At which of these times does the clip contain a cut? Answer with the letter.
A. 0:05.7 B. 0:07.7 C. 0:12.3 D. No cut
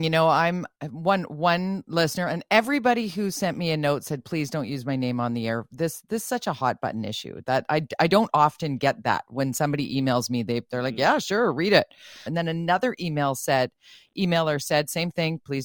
C